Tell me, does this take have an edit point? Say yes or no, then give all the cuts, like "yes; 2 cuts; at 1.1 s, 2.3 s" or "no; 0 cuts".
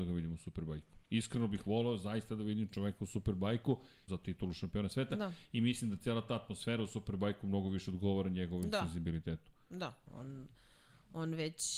yes; 2 cuts; at 4.1 s, 10.1 s